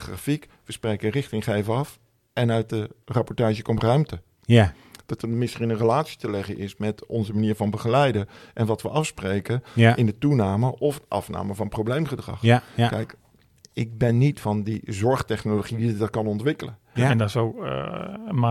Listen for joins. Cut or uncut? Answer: cut